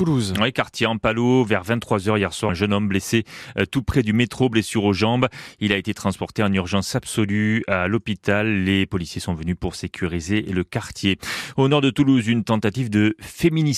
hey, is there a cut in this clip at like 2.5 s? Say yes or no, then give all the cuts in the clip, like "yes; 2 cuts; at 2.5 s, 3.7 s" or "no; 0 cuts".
yes; 1 cut; at 2.5 s